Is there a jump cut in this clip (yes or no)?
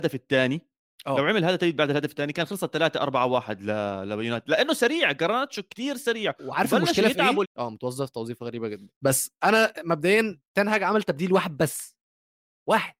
yes